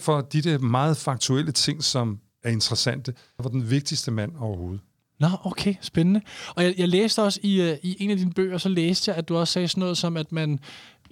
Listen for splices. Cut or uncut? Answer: cut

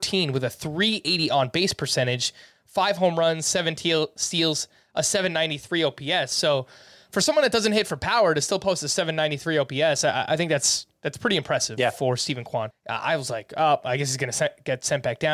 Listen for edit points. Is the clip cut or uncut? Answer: cut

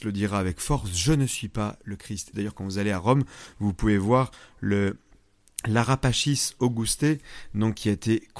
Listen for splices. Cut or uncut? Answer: cut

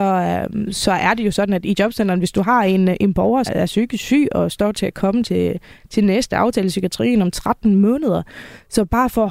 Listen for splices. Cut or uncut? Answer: cut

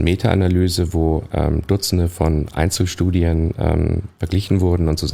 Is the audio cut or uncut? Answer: uncut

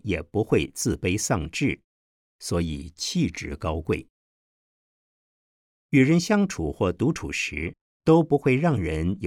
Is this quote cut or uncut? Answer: uncut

